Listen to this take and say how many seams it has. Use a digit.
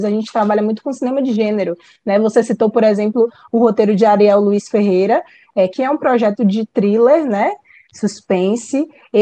1